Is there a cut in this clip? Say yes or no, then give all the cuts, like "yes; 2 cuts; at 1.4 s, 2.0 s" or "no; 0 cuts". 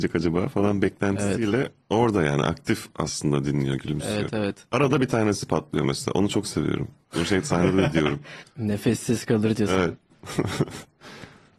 yes; 1 cut; at 8.4 s